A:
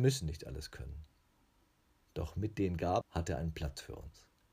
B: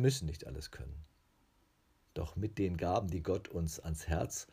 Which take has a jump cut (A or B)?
A